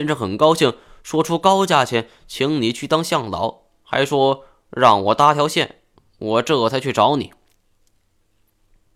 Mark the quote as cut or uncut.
uncut